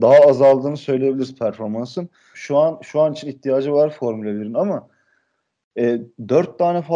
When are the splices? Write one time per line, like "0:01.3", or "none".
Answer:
0:02.3